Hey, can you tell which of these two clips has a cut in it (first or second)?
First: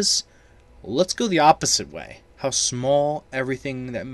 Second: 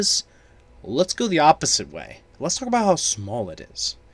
first